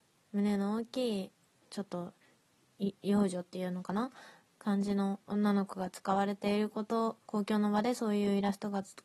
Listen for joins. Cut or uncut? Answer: cut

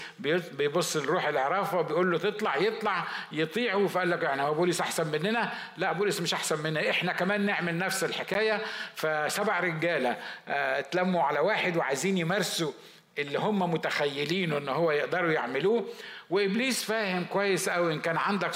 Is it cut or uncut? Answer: uncut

